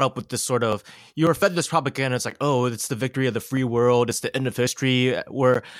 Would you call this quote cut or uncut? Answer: uncut